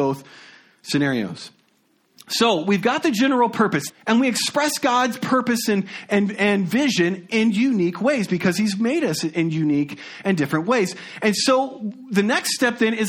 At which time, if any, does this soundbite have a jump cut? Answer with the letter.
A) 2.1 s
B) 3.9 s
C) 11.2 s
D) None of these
B